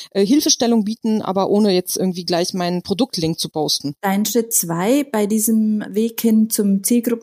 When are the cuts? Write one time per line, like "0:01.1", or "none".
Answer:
0:04.0
0:05.8

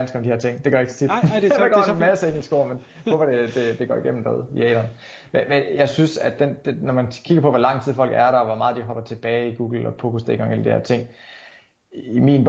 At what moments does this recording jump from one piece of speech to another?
none

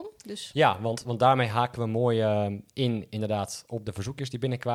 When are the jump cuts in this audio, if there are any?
none

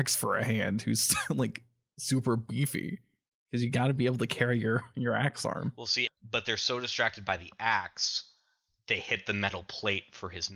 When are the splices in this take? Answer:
0:06.1

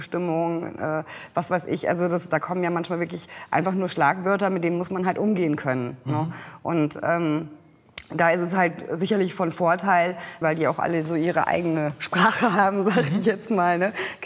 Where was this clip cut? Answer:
0:10.4

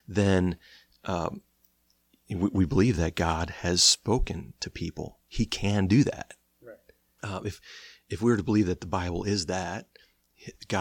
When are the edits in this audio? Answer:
0:07.2

